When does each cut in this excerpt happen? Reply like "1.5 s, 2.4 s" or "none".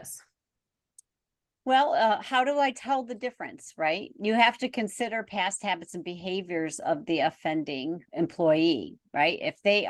none